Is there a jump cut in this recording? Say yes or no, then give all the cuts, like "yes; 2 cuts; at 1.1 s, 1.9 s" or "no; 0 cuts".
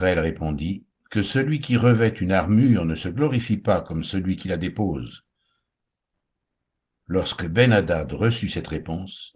no; 0 cuts